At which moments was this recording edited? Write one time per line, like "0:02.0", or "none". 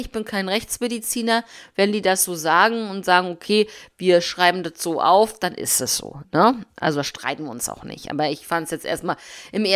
none